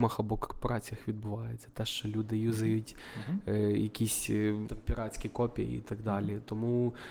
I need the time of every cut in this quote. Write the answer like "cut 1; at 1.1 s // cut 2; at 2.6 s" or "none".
cut 1; at 4.6 s

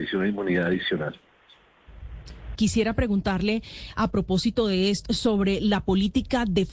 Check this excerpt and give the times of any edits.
cut 1; at 2.5 s // cut 2; at 5.0 s

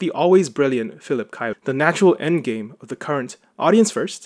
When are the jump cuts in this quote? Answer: cut 1; at 1.5 s

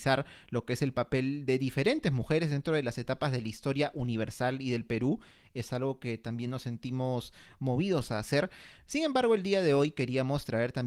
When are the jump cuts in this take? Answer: none

